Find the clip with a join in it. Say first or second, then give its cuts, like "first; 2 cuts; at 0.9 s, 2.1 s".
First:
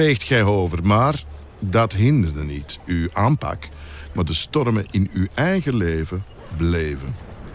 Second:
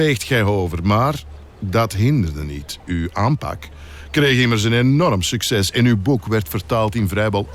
first; 1 cut; at 4.1 s